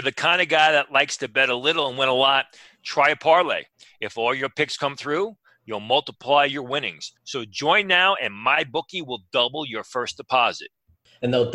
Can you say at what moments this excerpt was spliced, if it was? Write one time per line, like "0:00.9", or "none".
0:07.2